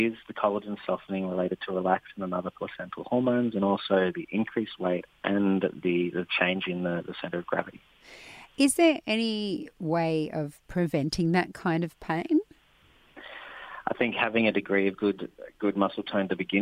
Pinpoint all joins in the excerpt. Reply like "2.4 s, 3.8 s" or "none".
13.8 s